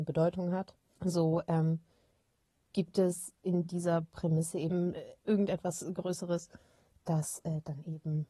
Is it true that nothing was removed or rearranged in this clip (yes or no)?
no